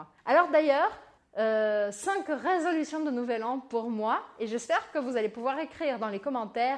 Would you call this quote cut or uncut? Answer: cut